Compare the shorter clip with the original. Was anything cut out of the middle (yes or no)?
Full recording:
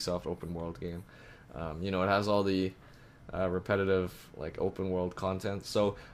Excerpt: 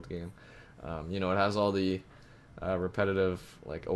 no